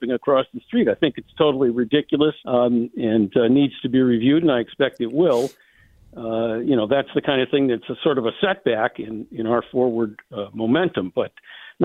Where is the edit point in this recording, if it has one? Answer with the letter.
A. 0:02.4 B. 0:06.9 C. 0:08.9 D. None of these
A